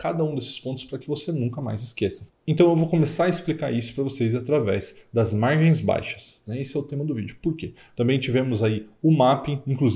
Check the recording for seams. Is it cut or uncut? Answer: cut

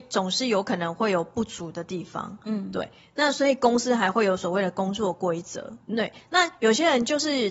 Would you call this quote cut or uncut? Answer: cut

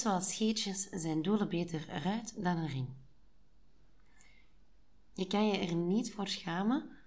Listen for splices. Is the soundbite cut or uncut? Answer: cut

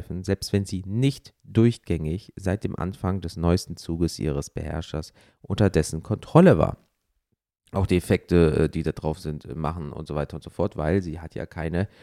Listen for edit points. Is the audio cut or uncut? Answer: cut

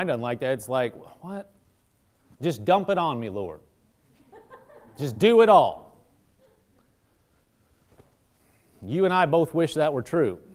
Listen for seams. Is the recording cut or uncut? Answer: cut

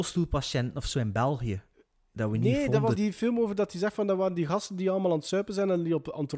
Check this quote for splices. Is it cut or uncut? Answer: cut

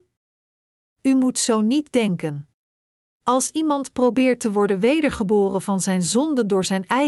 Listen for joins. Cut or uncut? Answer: cut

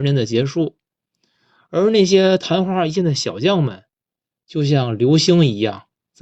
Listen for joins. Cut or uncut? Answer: uncut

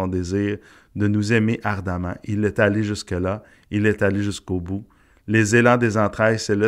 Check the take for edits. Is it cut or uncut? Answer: uncut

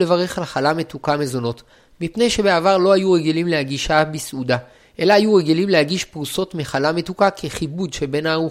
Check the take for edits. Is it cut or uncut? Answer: uncut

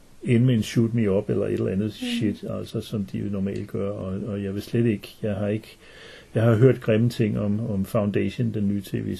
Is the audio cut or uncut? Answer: uncut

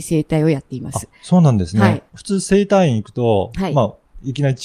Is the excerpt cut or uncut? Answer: uncut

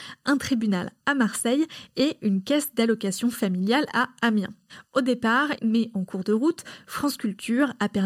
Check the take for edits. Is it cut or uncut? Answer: cut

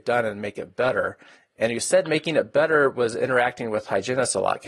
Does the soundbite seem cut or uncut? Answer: uncut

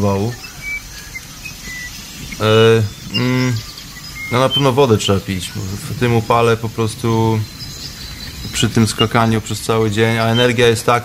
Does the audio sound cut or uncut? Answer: cut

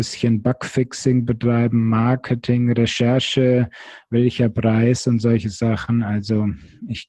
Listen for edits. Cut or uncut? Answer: uncut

